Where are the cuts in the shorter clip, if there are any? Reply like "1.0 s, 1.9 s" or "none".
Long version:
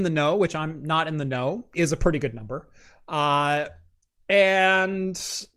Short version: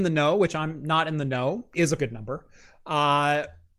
2.0 s